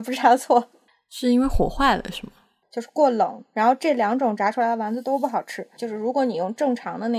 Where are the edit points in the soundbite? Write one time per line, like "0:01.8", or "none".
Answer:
0:02.6
0:05.8